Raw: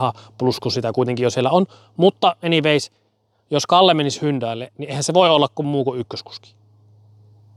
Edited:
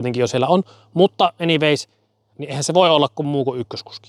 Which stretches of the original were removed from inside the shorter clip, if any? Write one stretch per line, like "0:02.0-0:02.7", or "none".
0:03.3-0:04.7

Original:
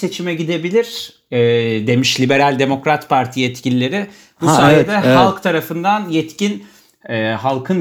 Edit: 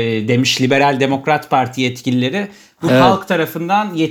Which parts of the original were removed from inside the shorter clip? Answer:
0:04.5-0:05.0

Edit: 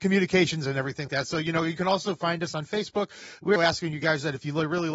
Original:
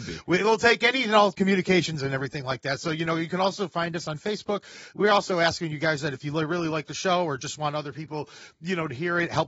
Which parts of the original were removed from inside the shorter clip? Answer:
0:02.4-0:02.6
0:05.1-0:05.3

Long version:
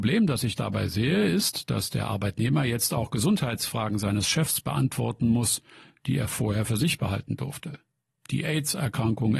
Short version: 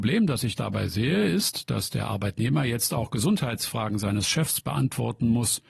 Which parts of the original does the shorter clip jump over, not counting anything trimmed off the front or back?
none

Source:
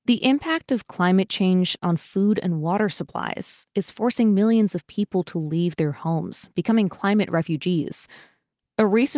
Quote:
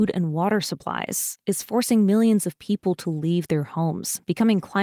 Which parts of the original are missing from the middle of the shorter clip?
none

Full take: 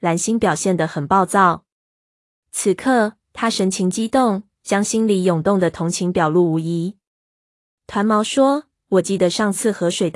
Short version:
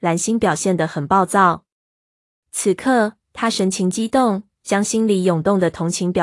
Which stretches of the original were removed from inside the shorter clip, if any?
none

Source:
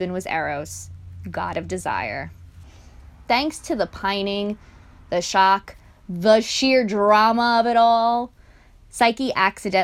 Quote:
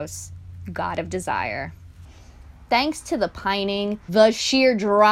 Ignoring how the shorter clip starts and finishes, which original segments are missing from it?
0:04.7-0:06.2

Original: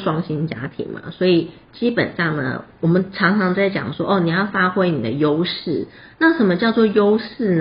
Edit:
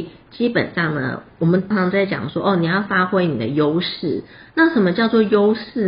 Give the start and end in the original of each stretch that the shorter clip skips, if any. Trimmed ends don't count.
0:03.1-0:03.3

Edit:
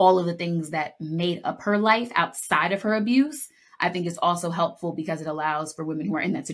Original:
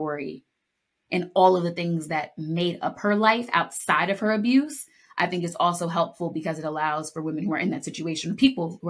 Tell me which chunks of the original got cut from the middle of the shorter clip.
none

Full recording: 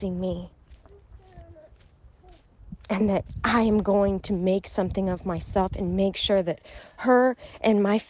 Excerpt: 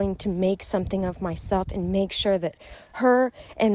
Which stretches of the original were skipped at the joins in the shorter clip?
none

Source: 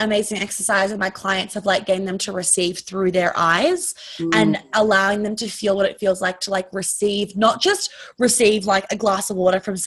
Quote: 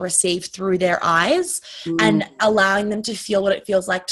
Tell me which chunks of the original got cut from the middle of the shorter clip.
none

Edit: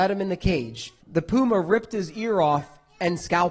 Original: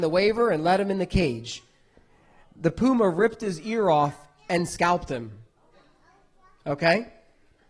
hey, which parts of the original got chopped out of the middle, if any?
0:01.7-0:02.5

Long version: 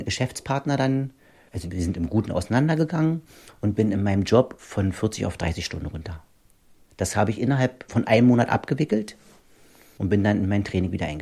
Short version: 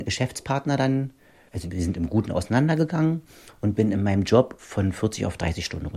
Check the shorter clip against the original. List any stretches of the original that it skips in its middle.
none

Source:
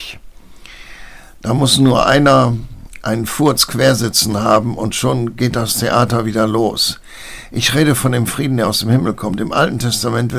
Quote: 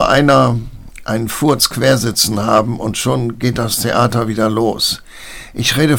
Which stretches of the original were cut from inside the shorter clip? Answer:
none

